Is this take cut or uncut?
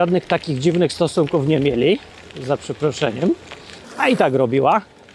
cut